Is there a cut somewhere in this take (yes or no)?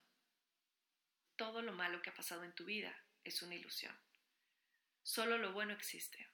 yes